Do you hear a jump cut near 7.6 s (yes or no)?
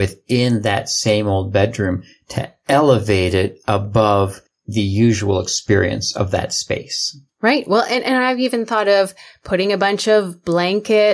no